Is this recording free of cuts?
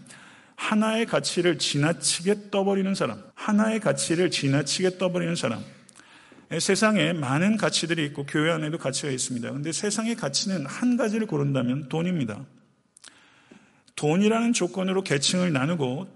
no; 1 cut; at 3.3 s

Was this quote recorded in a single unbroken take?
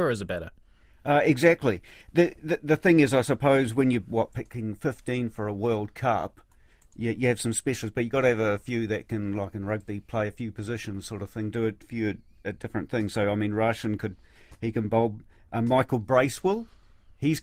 yes; 0 cuts

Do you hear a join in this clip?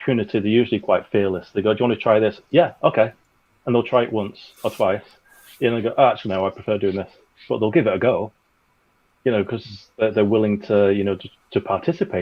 no; 0 cuts

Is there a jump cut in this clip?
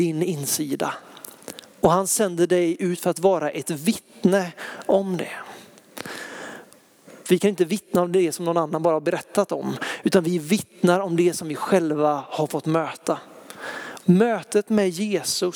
yes; 2 cuts; at 7.2 s, 14.0 s

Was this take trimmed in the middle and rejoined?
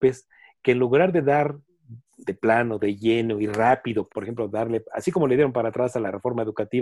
yes; 1 cut; at 4.1 s

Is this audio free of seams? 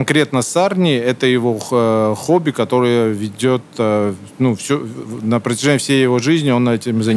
yes; 0 cuts

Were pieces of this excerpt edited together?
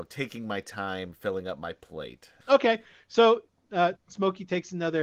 yes; 2 cuts; at 2.4 s, 3.9 s

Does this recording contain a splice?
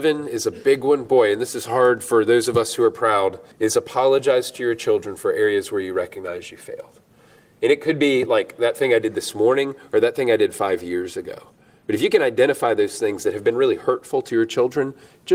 yes; 1 cut; at 3.5 s

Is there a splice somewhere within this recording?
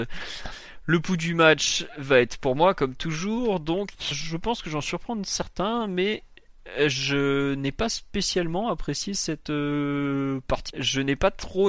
yes; 2 cuts; at 4.1 s, 10.7 s

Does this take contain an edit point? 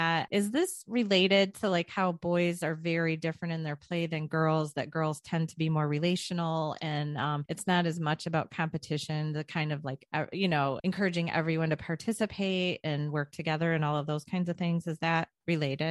no; 0 cuts

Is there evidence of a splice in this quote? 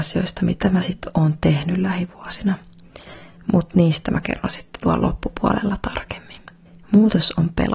no; 0 cuts

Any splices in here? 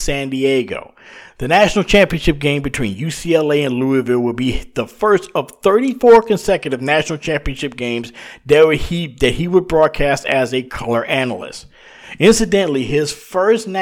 no; 0 cuts

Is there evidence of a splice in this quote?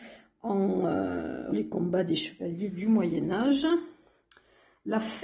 yes; 1 cut; at 1.5 s

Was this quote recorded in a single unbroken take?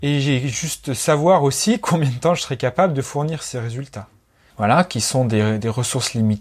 no; 1 cut; at 4.5 s

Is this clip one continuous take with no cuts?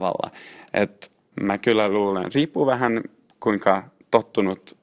no; 1 cut; at 1.3 s

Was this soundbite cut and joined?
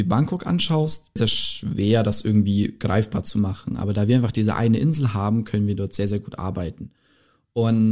yes; 1 cut; at 1.2 s

